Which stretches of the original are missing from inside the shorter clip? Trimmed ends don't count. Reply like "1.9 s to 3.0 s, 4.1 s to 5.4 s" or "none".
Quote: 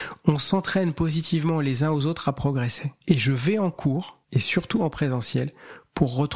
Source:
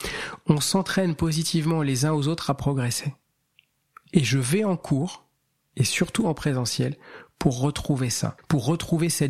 3.2 s to 4.1 s, 5.3 s to 5.7 s